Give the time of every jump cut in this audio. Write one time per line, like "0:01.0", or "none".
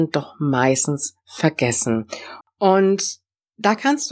0:02.4